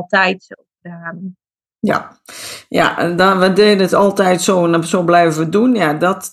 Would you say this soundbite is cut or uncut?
uncut